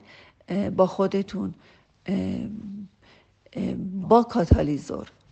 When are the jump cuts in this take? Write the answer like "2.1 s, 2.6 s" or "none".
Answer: 4.0 s